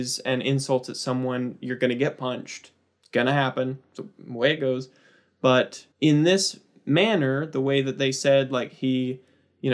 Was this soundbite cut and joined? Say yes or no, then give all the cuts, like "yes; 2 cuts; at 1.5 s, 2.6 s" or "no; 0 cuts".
yes; 2 cuts; at 4.0 s, 5.9 s